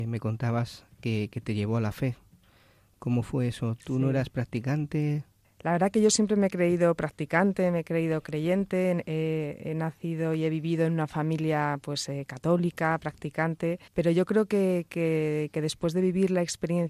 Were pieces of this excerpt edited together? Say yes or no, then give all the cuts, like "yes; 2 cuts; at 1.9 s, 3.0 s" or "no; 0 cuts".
yes; 2 cuts; at 5.4 s, 13.9 s